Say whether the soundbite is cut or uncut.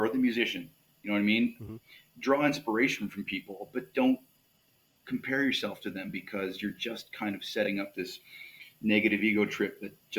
uncut